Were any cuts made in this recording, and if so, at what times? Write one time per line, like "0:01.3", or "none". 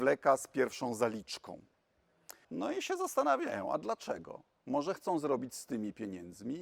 0:02.4

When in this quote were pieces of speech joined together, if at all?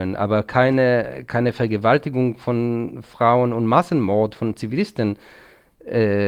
none

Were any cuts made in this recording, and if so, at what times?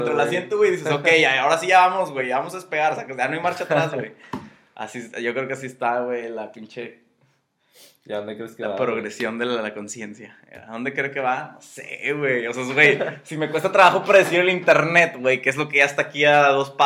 none

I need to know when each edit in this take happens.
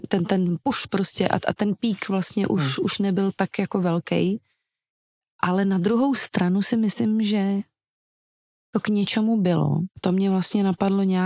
0:09.9

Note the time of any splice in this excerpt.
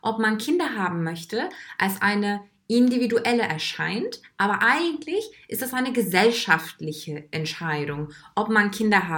none

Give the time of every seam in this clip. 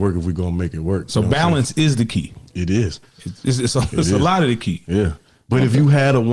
none

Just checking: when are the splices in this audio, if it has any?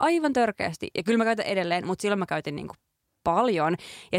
none

